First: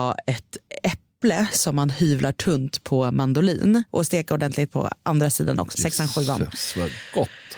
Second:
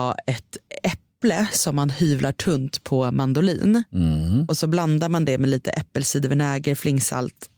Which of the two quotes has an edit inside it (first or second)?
first